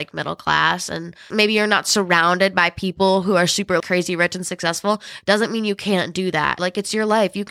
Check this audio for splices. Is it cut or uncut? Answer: cut